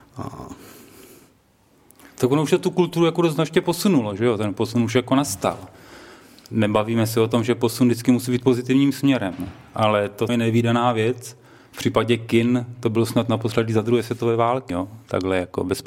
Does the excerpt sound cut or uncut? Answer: cut